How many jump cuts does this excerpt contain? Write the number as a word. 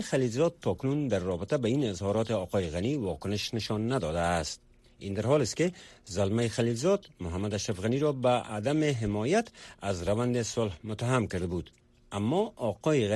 zero